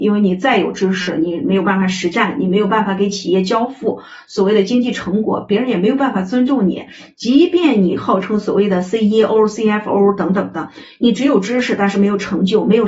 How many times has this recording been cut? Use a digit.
0